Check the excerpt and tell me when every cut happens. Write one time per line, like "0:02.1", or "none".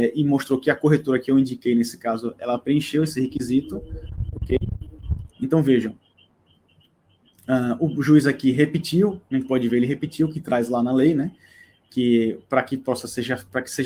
0:05.3